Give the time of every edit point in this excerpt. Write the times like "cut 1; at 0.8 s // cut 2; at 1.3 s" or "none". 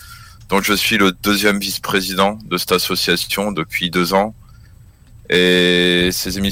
none